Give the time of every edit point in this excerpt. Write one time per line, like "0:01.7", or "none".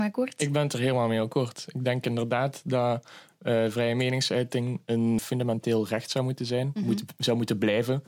0:05.2

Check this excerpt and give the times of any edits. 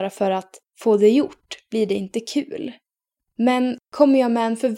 none

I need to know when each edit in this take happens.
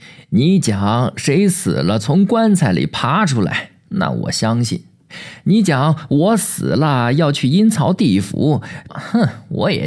0:08.9

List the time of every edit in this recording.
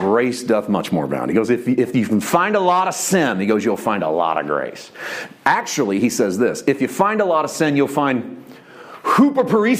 none

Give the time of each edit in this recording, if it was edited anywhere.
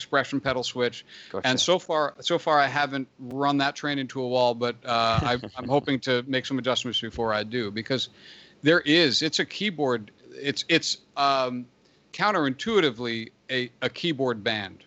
none

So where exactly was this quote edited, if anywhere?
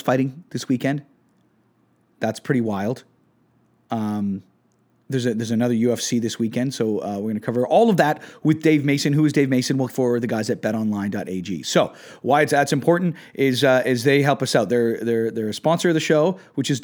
0:09.9

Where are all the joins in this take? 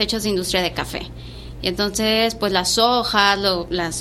none

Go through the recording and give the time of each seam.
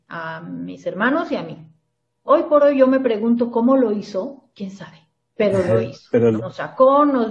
0:02.3
0:06.4

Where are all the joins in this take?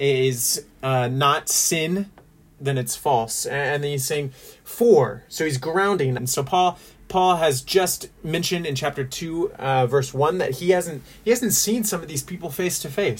0:02.6
0:06.2

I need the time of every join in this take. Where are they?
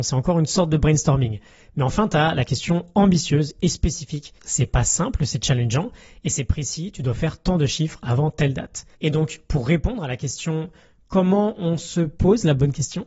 0:04.4
0:08.9

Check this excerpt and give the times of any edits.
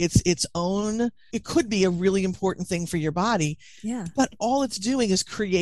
0:01.3

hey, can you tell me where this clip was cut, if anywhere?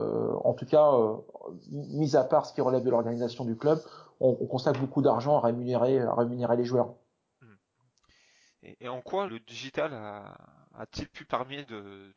0:09.3

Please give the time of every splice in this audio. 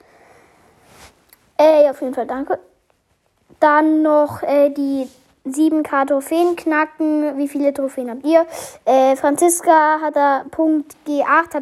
none

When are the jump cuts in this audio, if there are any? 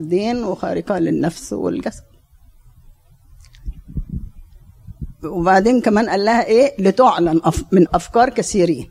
0:07.9

